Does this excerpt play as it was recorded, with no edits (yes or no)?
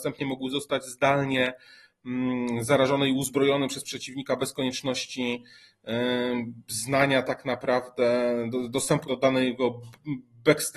no